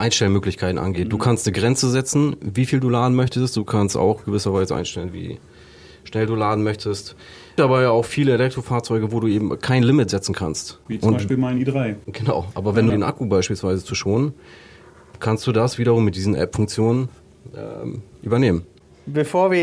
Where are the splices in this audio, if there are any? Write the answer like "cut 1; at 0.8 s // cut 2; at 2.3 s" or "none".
cut 1; at 7.6 s // cut 2; at 12.9 s